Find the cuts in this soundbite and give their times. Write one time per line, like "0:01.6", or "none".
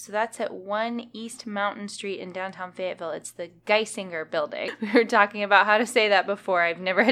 0:04.7